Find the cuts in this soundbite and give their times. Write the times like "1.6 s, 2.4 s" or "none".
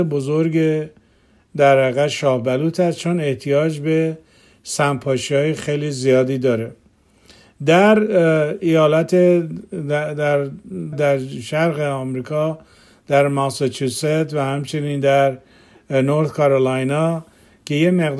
10.9 s